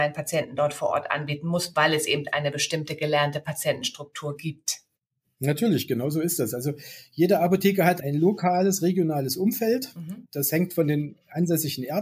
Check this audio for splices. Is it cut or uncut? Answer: uncut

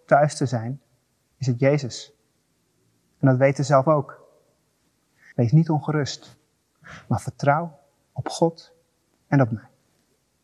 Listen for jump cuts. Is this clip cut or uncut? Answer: cut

